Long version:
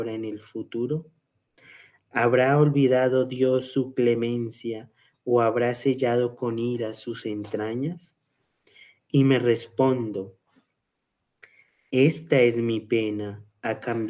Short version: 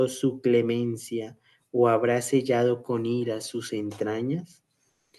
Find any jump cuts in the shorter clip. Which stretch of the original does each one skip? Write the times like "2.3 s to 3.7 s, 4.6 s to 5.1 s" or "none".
none